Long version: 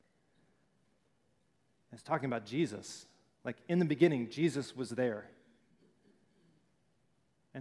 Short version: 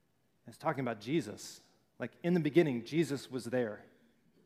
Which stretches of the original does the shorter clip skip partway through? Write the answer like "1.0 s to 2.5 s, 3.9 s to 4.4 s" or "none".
none